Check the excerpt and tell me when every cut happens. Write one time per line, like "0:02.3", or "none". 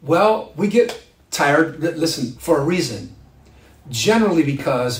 0:02.4